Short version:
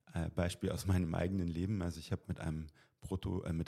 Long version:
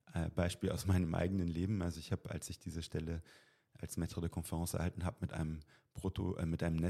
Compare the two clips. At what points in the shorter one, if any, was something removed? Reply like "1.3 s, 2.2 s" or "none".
2.2 s